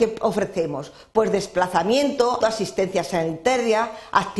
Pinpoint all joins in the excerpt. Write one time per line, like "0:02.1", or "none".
0:02.4